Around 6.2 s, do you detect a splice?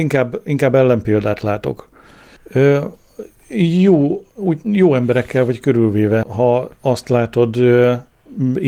yes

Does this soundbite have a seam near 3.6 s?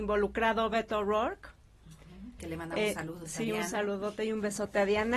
no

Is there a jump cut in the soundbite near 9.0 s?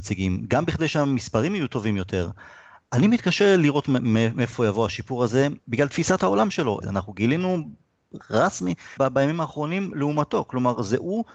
yes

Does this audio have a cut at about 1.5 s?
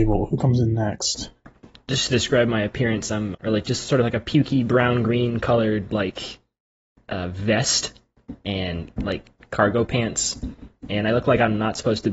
no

